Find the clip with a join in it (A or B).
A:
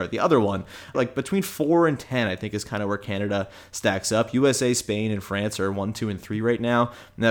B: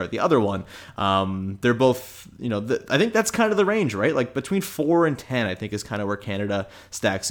A